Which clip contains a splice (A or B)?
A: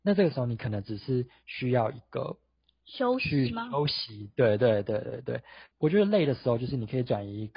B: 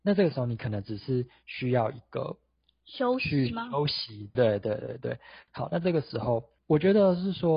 B